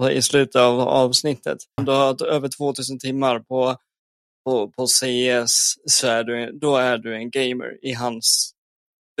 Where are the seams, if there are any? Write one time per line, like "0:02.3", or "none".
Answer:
0:01.8